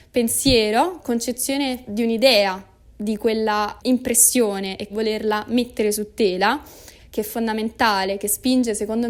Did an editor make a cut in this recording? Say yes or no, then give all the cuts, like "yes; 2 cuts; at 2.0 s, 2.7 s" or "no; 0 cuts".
yes; 3 cuts; at 1.0 s, 4.9 s, 7.0 s